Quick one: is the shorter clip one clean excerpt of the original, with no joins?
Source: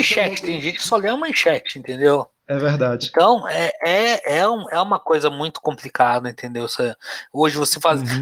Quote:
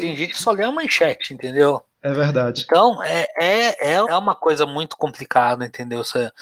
no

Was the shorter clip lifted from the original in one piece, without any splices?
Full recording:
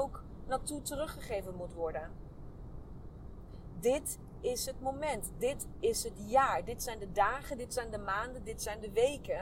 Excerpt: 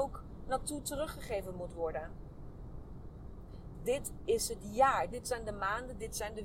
no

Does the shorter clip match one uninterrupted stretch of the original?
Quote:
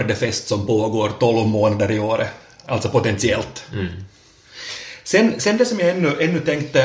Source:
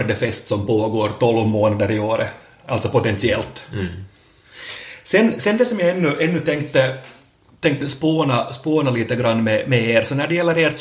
yes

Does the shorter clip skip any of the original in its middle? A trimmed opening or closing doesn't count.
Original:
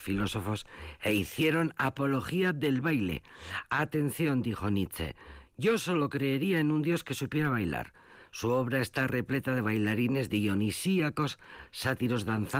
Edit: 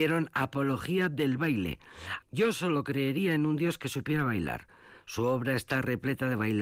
yes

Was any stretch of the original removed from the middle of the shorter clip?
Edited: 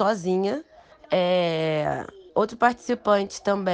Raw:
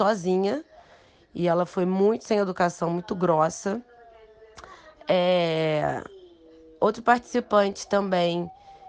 yes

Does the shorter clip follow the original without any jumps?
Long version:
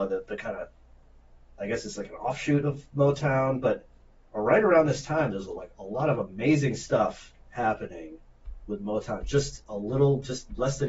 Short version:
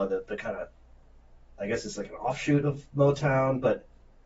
yes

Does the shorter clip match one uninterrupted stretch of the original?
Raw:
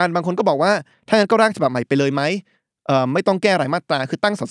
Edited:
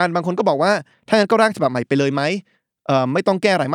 yes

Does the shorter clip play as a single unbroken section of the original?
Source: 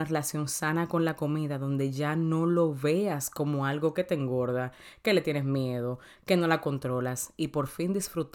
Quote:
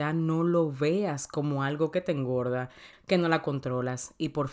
no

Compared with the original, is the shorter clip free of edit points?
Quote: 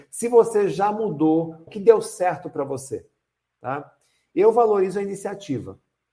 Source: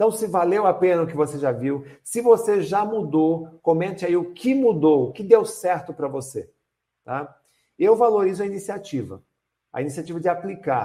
no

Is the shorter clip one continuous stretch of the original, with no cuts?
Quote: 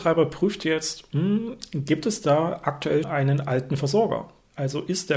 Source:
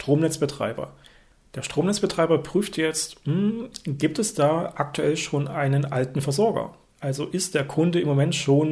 no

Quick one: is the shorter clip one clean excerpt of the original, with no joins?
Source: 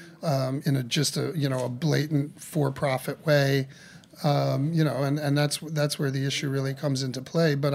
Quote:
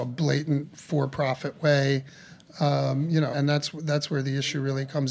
no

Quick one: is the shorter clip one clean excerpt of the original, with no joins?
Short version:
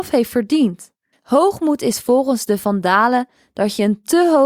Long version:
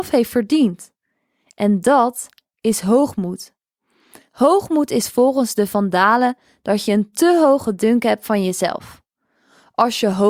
no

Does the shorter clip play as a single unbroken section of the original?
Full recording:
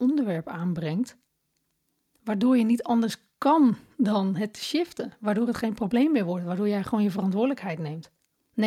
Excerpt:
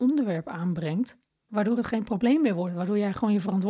no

